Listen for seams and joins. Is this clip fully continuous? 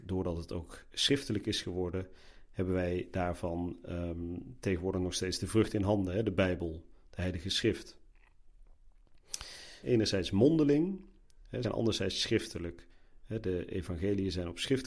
no; 2 cuts; at 9.8 s, 11.6 s

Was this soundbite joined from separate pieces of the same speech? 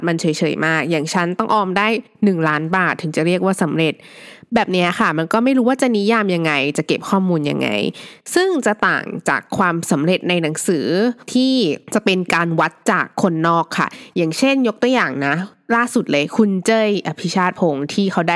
no; 0 cuts

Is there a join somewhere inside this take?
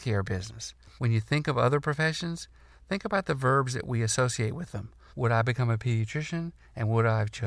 yes; 2 cuts; at 1.0 s, 5.1 s

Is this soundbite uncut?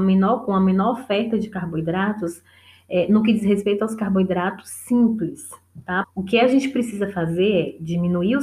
no; 1 cut; at 6.0 s

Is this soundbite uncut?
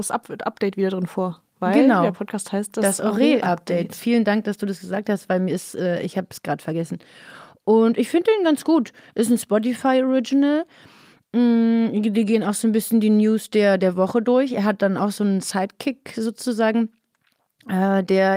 yes; 0 cuts

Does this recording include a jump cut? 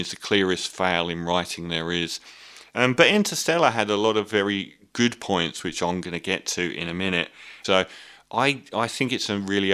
yes; 1 cut; at 7.6 s

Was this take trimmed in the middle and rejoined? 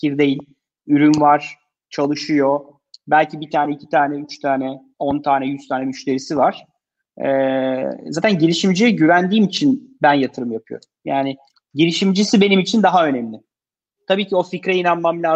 no; 0 cuts

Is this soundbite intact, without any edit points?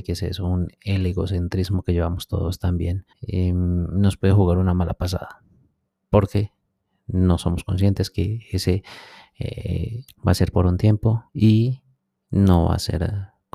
no; 3 cuts; at 3.1 s, 10.1 s, 11.3 s

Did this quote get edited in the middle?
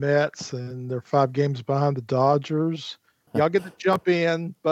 yes; 1 cut; at 3.3 s

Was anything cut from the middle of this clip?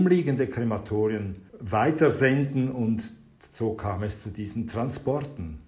yes; 1 cut; at 1.5 s

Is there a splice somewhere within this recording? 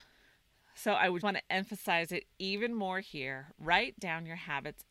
yes; 1 cut; at 1.2 s

